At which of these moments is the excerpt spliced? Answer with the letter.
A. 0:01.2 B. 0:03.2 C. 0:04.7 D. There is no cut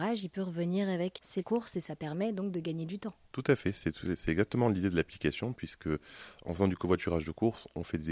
A